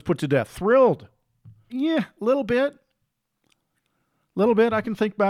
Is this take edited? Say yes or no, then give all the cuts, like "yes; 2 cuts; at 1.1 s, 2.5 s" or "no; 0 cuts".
yes; 1 cut; at 1.7 s